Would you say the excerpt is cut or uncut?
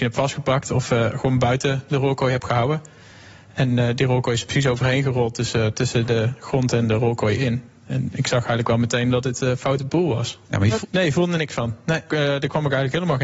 cut